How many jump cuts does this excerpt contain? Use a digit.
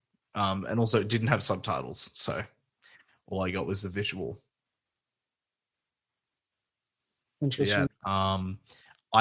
1